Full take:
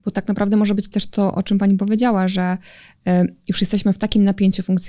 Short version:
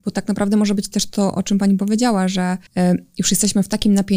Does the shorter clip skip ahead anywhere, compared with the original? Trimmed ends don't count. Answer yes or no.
yes